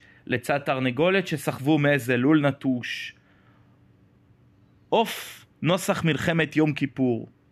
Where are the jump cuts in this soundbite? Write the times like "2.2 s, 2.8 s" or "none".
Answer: none